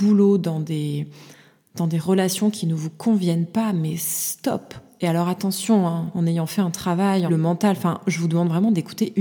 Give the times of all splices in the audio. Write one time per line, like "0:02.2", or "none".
0:04.9
0:07.3